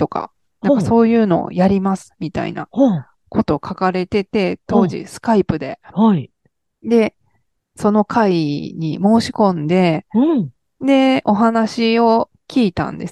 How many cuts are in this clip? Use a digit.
1